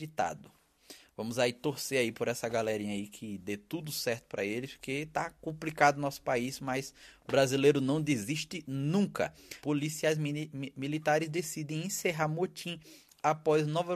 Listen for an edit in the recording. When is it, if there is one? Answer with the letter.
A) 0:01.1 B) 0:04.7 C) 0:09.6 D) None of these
C